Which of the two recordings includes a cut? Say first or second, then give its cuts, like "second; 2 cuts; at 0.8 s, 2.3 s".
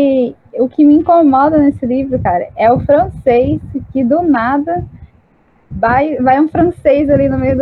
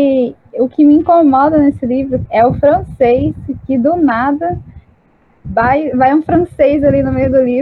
second; 1 cut; at 2.3 s